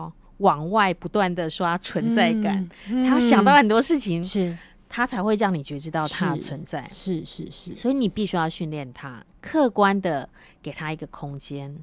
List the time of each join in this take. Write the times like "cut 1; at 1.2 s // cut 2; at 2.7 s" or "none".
none